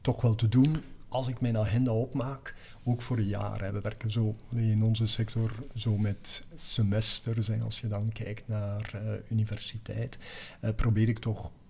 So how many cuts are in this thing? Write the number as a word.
one